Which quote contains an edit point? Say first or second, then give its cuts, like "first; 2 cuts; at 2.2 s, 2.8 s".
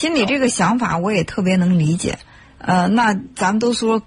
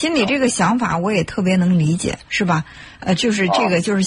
second; 1 cut; at 2.3 s